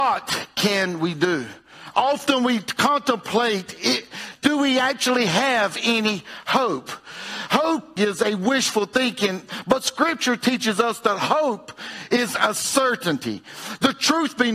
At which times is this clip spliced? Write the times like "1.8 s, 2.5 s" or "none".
8.0 s